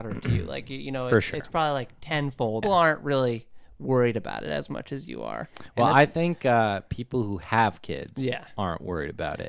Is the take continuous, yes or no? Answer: no